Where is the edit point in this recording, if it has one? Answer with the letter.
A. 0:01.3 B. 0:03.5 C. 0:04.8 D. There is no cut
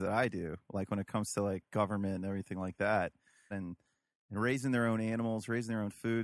B